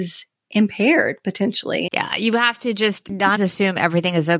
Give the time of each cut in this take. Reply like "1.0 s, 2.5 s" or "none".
1.9 s, 3.4 s

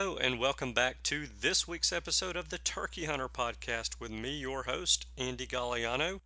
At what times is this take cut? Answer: none

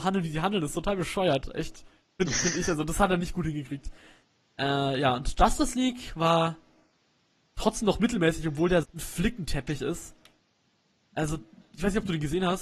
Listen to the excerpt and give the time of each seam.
8.8 s

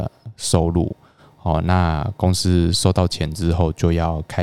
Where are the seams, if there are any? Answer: none

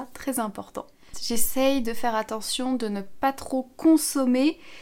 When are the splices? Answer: 1.1 s

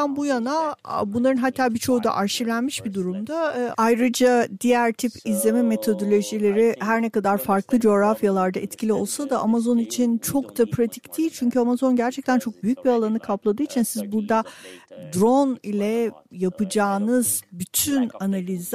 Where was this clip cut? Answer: 3.7 s

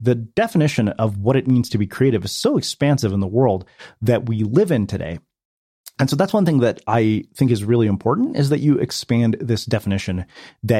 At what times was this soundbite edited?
none

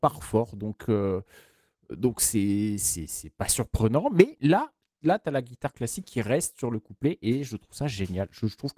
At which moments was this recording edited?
none

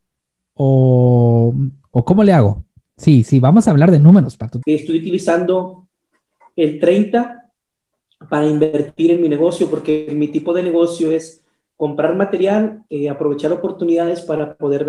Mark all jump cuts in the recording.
4.6 s

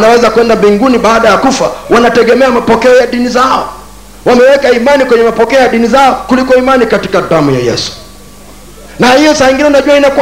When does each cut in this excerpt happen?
none

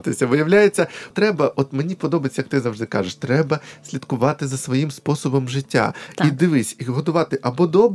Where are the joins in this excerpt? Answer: 1.1 s

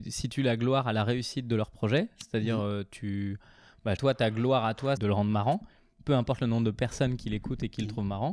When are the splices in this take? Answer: 4.0 s, 5.0 s

